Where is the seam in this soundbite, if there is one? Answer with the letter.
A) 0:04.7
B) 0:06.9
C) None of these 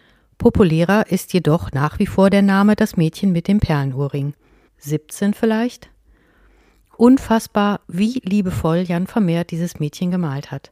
A